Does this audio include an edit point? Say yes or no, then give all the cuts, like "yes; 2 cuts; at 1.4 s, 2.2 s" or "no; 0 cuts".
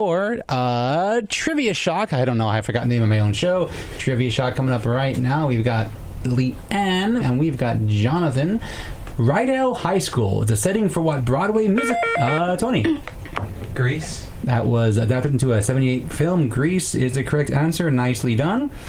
yes; 2 cuts; at 7.2 s, 9.1 s